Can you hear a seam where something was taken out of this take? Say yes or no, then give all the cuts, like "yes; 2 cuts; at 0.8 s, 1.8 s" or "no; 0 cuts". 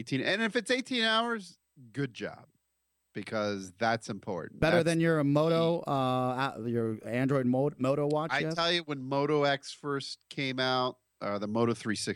no; 0 cuts